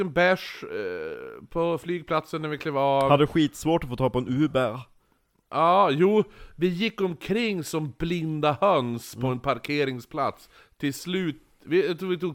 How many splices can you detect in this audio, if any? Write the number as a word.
zero